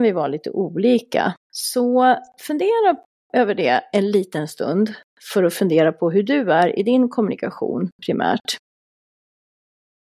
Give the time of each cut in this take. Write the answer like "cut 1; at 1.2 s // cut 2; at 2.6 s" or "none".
cut 1; at 1.4 s

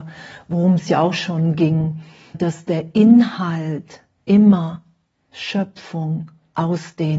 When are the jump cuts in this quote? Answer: cut 1; at 2.3 s

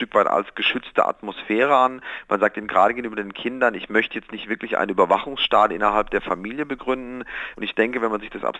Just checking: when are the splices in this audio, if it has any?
cut 1; at 7.5 s

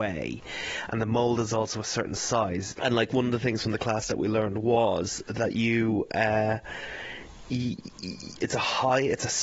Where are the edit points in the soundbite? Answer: cut 1; at 2.8 s

